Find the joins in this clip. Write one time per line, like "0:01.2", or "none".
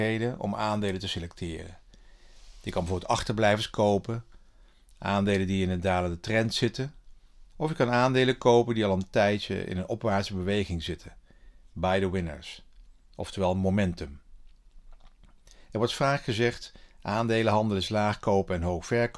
0:07.5

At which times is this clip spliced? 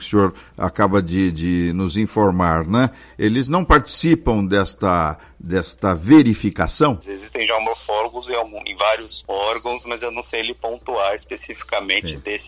0:07.0

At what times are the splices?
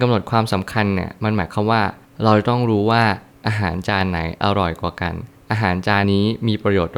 0:06.0

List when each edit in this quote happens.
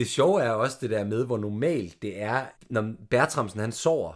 0:02.5

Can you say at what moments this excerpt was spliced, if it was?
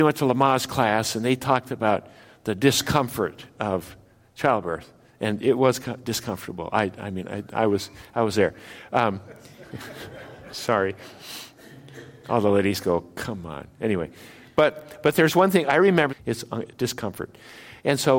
0:16.1

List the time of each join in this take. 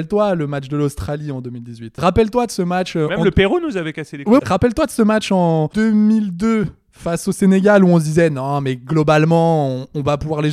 0:04.4

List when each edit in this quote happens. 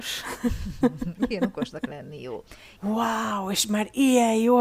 0:02.8

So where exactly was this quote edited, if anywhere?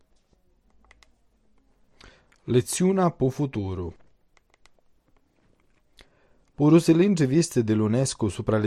none

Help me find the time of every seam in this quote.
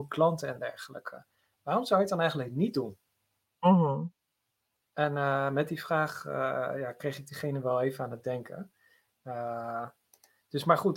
none

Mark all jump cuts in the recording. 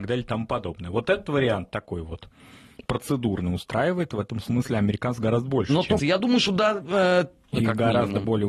0:06.0
0:07.5

